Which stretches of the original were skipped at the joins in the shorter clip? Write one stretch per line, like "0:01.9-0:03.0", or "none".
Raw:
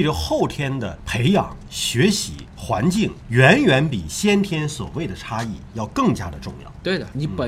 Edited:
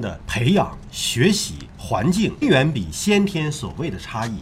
0:03.2-0:03.6